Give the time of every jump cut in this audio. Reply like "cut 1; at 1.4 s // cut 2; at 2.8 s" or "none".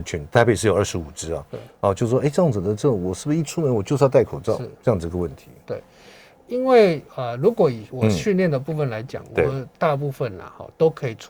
none